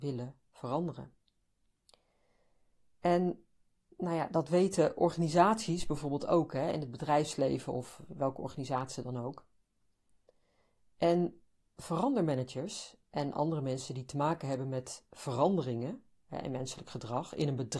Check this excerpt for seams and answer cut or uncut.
uncut